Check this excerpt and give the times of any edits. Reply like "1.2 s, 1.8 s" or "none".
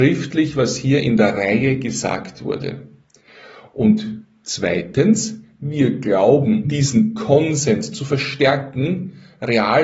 6.6 s